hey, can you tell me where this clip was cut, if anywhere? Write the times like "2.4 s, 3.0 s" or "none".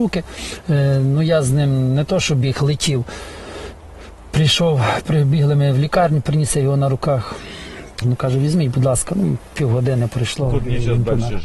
8.0 s